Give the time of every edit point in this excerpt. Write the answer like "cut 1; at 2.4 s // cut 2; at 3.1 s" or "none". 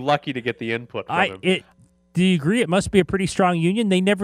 none